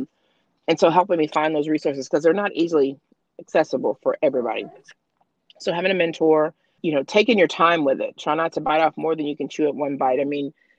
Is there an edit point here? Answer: yes; 1 cut; at 6.8 s

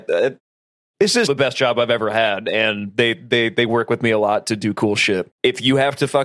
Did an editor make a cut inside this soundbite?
yes; 2 cuts; at 1.3 s, 5.3 s

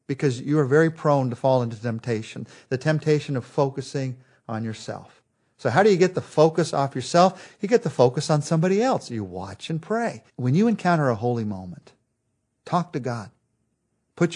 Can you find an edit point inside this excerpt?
yes; 1 cut; at 10.3 s

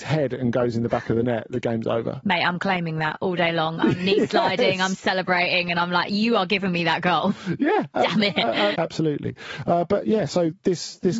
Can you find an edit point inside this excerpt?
yes; 1 cut; at 8.7 s

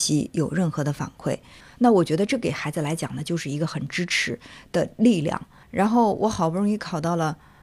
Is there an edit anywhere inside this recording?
yes; 2 cuts; at 1.6 s, 5.6 s

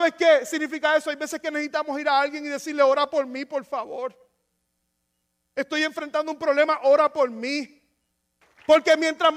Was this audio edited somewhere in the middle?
yes; 1 cut; at 8.4 s

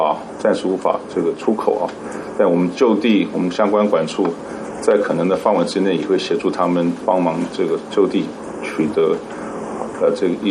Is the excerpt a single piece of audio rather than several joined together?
yes; 0 cuts

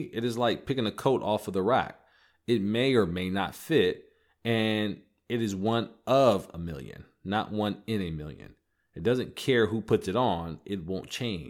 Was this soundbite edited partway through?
no; 0 cuts

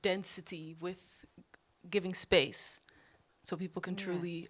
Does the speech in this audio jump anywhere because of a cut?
no; 0 cuts

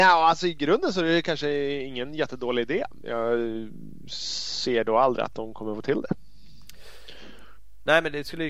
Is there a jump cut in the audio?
no; 0 cuts

